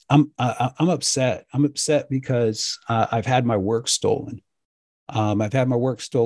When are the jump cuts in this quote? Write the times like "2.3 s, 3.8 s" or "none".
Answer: none